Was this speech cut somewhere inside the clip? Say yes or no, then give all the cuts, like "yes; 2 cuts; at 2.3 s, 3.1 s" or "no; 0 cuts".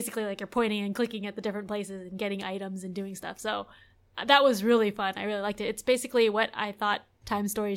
no; 0 cuts